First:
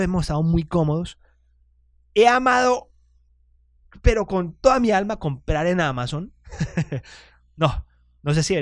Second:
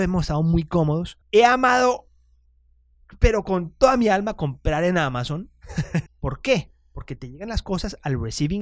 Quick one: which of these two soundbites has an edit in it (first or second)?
second